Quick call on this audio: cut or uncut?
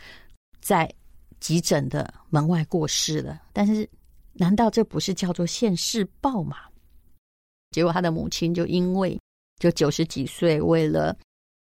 cut